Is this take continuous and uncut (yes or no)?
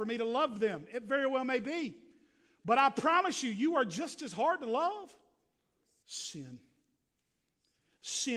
no